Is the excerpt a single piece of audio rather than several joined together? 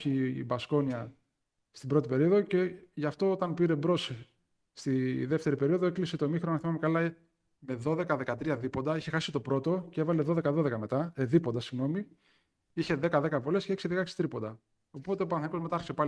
yes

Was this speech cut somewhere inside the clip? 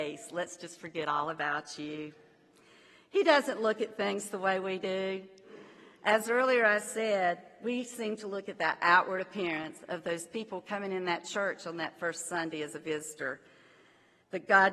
no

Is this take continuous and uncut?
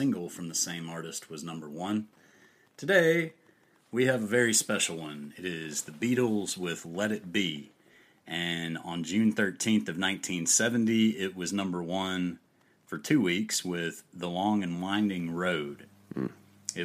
yes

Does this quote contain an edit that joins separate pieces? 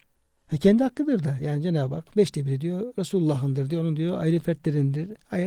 no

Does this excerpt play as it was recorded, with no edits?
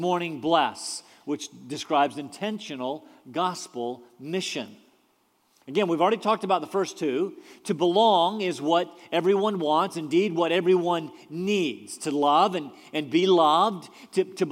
yes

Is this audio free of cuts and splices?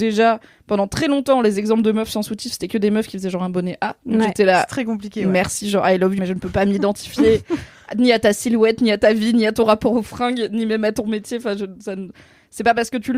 no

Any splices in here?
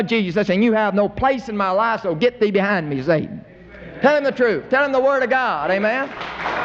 no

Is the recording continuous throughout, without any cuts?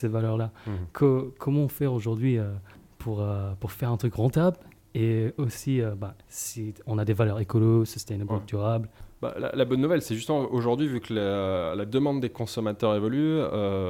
yes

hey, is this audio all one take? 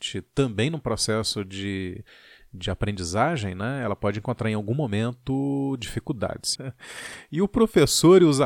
no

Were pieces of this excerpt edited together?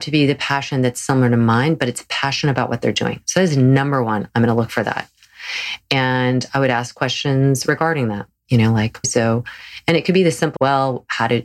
yes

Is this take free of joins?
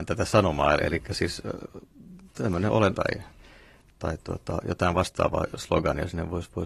no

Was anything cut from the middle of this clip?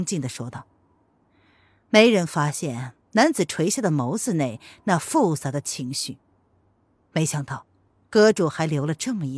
yes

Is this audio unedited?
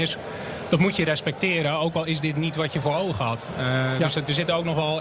yes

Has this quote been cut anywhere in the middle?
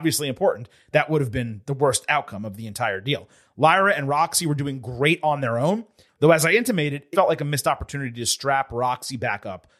yes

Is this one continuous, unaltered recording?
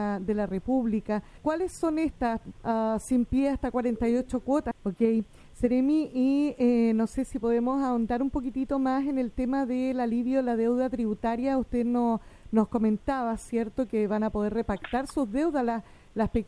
no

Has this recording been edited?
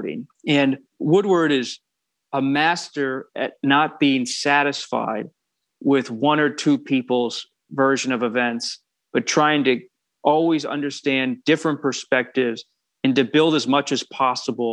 no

